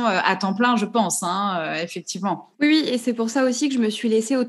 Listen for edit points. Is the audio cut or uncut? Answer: cut